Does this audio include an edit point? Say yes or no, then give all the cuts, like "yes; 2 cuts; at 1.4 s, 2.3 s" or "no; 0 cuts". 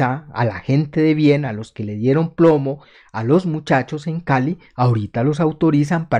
no; 0 cuts